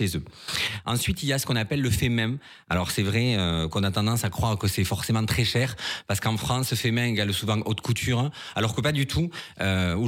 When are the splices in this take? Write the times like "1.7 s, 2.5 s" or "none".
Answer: none